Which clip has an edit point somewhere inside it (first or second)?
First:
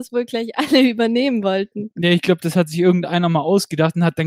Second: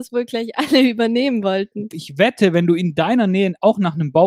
second